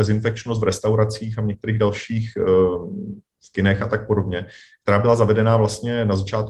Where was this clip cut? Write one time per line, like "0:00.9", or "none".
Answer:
none